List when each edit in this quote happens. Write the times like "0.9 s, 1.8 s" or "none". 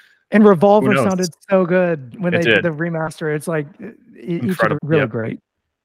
4.7 s

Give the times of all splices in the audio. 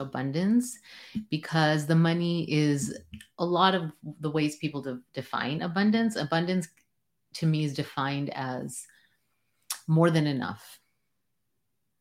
none

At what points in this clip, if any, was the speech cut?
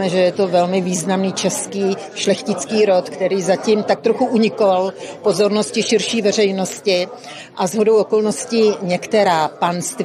none

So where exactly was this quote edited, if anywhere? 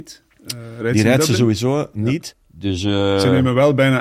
2.3 s

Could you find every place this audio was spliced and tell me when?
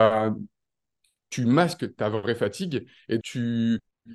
3.2 s

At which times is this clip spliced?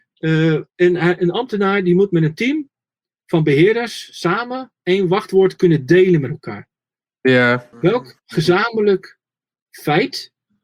7.7 s

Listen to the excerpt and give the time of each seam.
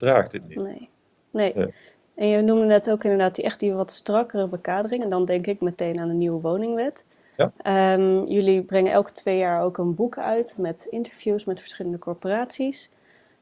none

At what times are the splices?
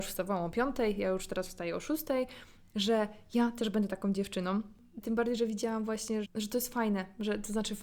5.0 s, 6.2 s

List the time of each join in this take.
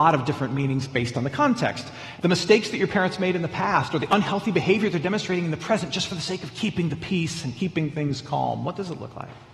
2.2 s

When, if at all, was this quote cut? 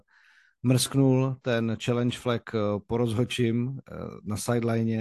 none

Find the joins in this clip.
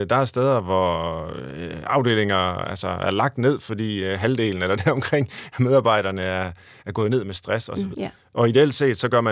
7.9 s

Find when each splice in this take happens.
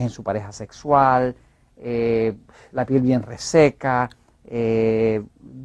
none

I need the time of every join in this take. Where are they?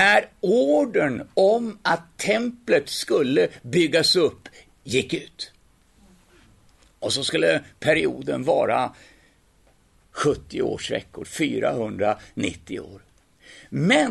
11.2 s

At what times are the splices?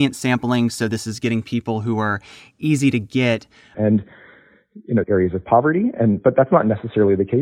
3.7 s, 5.0 s

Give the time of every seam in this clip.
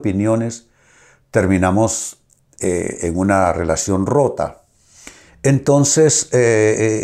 5.3 s

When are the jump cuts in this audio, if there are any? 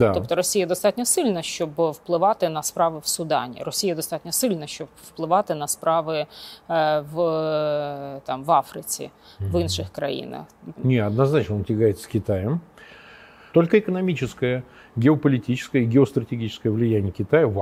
10.8 s, 13.5 s

